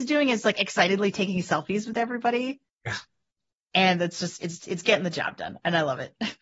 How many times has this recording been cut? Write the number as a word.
zero